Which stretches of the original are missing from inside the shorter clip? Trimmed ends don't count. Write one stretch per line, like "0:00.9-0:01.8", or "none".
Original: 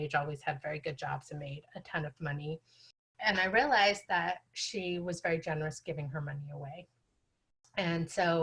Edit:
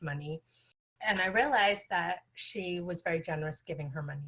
none